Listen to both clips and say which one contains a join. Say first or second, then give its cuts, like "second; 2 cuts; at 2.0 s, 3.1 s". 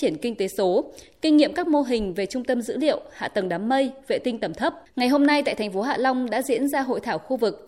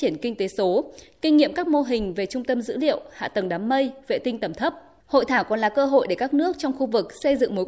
first; 1 cut; at 4.8 s